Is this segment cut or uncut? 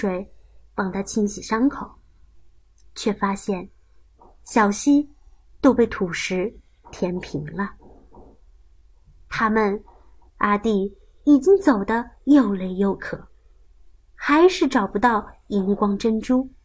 cut